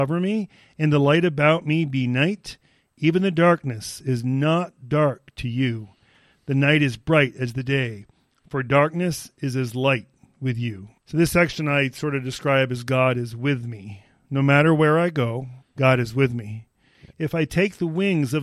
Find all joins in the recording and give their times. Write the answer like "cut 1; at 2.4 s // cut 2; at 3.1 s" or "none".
cut 1; at 11.0 s // cut 2; at 15.6 s // cut 3; at 17.1 s